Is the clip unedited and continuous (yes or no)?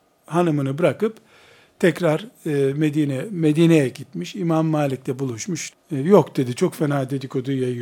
no